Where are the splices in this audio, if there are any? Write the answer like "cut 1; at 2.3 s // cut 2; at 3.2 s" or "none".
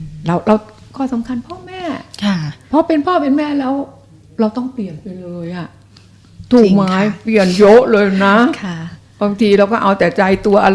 cut 1; at 2.6 s